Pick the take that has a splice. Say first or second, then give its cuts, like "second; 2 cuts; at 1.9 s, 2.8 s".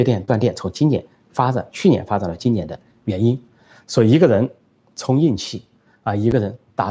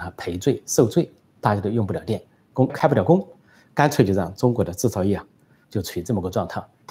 second; 2 cuts; at 2.7 s, 5.6 s